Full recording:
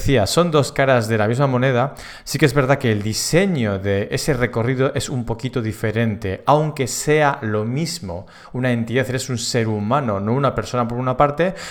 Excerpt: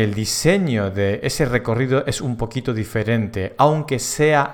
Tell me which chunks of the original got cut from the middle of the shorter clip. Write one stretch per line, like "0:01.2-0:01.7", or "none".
none